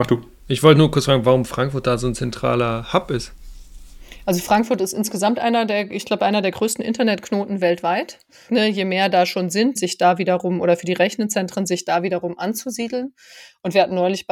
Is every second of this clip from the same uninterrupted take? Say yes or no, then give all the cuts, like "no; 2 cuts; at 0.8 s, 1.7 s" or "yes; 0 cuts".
no; 2 cuts; at 8.5 s, 9.8 s